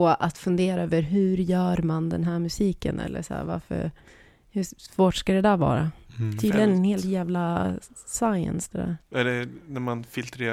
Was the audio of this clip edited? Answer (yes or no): no